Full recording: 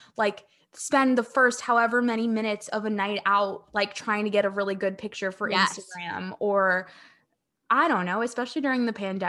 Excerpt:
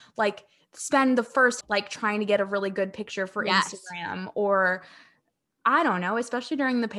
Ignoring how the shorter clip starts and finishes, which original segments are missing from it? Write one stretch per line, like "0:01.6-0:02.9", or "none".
0:01.6-0:03.7